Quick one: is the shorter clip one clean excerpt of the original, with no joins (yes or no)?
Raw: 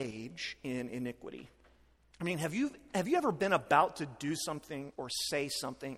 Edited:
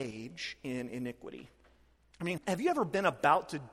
no